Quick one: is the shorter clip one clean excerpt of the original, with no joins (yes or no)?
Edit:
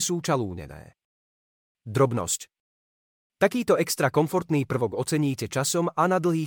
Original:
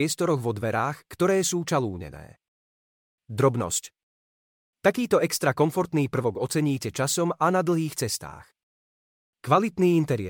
yes